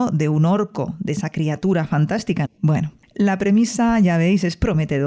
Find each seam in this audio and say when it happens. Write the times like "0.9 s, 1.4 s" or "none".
2.4 s